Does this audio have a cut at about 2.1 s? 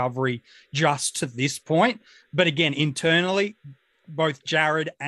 no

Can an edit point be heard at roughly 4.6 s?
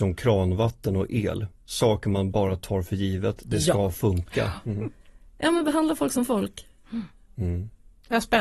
yes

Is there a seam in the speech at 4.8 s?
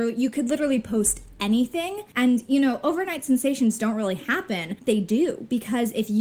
yes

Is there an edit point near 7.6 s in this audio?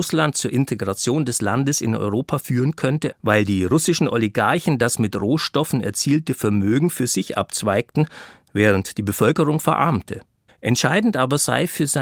no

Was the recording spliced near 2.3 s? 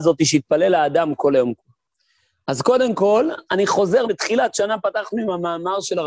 no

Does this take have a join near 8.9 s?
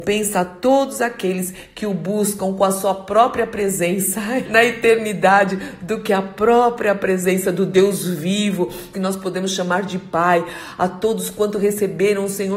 yes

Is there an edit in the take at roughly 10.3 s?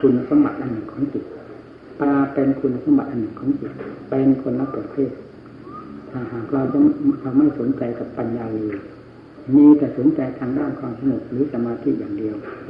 no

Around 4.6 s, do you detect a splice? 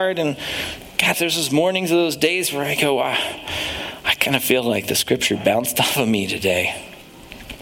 no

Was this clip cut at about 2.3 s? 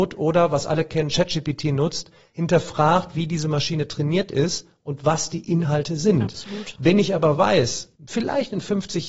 no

